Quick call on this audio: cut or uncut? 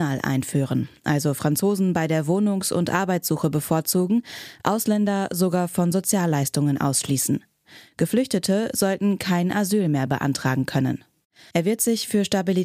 cut